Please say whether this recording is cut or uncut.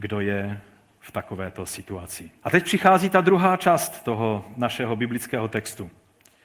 cut